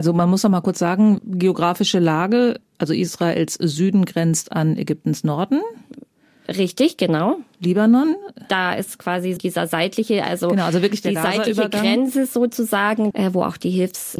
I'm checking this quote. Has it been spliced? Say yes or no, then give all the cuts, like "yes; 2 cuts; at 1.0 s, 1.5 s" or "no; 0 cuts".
yes; 2 cuts; at 9.4 s, 13.1 s